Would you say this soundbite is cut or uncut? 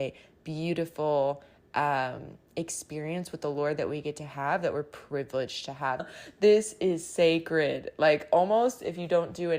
cut